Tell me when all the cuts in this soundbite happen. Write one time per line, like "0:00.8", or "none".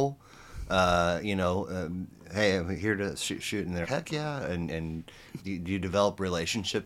0:03.8
0:05.4